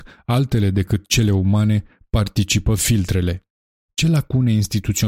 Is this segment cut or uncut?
cut